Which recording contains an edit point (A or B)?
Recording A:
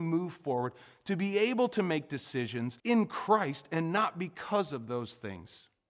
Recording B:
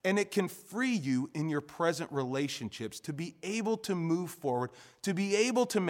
A